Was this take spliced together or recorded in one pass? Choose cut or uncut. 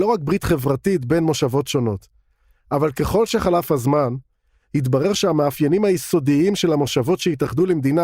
uncut